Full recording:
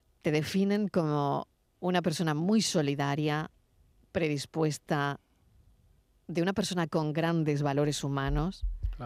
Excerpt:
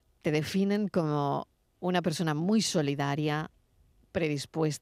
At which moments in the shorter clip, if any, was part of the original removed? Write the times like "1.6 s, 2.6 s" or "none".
none